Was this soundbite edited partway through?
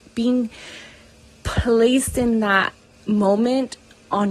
no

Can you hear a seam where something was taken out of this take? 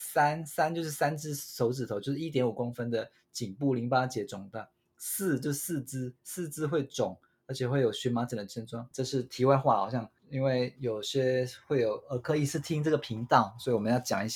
yes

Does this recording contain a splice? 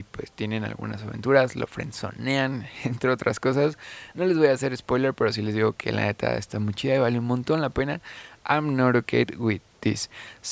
no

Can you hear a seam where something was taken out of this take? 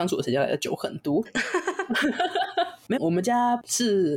yes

